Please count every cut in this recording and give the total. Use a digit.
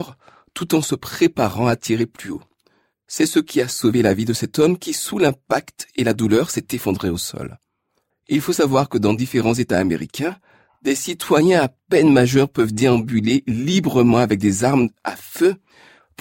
1